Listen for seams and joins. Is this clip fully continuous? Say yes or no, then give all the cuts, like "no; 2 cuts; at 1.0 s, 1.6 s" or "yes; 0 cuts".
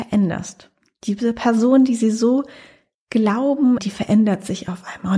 no; 1 cut; at 3.8 s